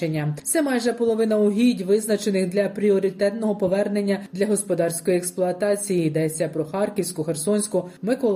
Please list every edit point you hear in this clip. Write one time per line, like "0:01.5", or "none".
none